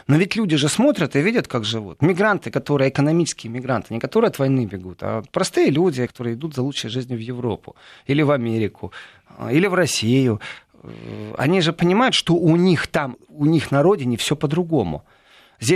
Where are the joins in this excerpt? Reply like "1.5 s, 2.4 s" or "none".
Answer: 6.1 s, 13.1 s